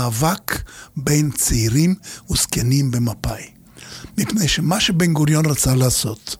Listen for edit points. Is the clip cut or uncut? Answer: uncut